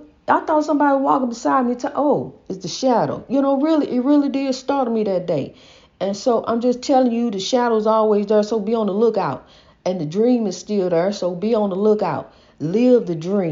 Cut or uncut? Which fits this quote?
uncut